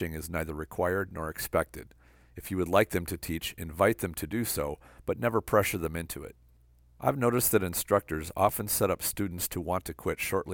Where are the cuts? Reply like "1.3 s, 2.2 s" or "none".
none